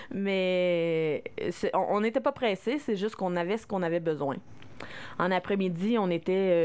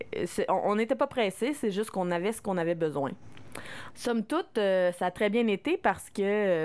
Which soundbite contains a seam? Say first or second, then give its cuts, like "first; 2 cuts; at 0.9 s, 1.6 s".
second; 1 cut; at 3.9 s